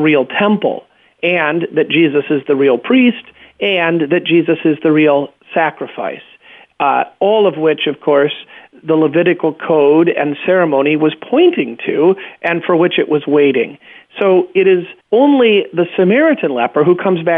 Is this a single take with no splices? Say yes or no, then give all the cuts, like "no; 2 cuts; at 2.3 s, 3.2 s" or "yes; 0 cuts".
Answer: no; 1 cut; at 15.0 s